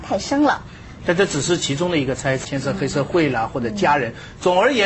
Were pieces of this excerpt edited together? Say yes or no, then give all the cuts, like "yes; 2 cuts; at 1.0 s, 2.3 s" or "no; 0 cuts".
yes; 2 cuts; at 1.0 s, 2.4 s